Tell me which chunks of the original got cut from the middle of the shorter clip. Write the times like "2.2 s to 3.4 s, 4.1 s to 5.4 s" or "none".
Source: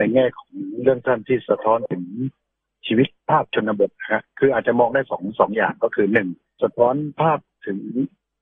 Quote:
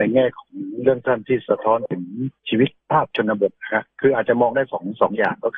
2.4 s to 2.8 s